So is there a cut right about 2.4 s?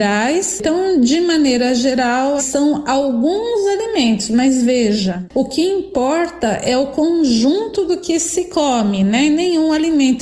yes; 1 cut; at 2.4 s

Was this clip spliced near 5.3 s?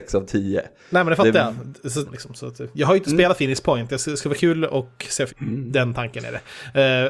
yes; 2 cuts; at 2.0 s, 5.3 s

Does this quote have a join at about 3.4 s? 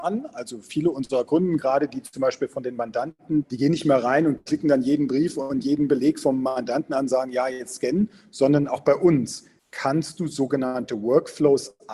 yes; 1 cut; at 3.4 s

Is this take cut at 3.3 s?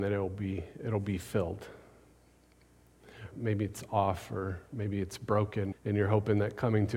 yes; 2 cuts; at 3.3 s, 5.7 s

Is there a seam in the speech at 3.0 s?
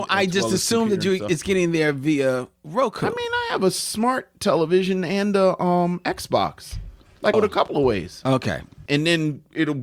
no; 2 cuts; at 7.3 s, 8.9 s

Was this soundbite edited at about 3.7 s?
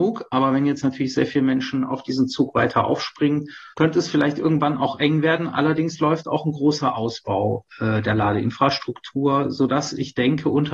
yes; 1 cut; at 3.7 s

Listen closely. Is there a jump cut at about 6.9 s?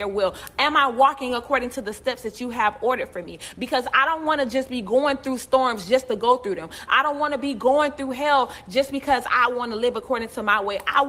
no; 0 cuts

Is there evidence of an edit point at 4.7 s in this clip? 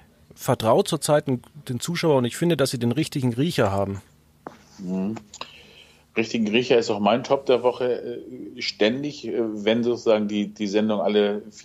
no; 0 cuts

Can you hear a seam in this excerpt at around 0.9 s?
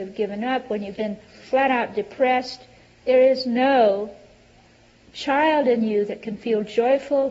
yes; 1 cut; at 0.9 s

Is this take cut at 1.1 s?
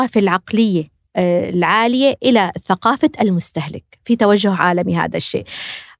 yes; 1 cut; at 1.1 s

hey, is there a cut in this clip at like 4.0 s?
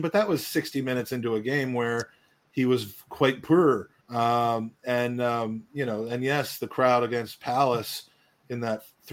yes; 1 cut; at 4.0 s

